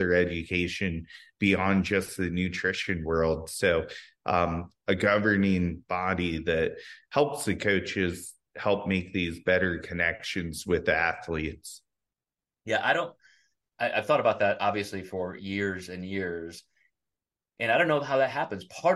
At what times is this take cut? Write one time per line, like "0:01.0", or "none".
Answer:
0:04.8